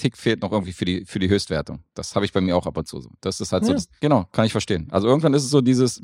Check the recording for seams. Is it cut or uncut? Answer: cut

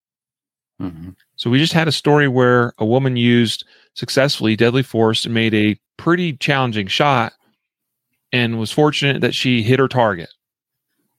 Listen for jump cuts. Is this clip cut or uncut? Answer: cut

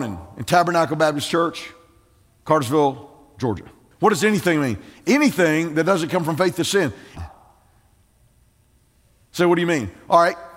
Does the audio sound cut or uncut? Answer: cut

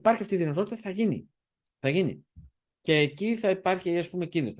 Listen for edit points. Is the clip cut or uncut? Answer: uncut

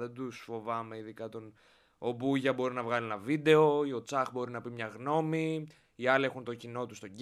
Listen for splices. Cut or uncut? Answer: uncut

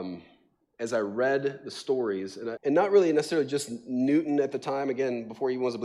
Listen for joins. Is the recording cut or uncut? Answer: cut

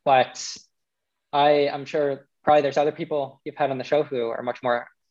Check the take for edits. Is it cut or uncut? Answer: uncut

